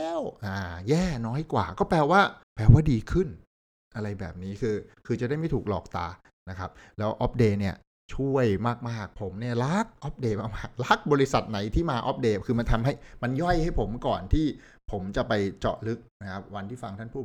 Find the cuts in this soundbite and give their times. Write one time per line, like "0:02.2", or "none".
0:02.4